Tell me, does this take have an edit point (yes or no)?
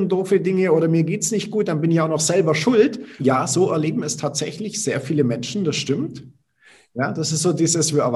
yes